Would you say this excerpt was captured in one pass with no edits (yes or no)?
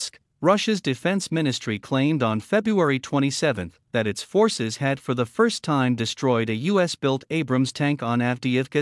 yes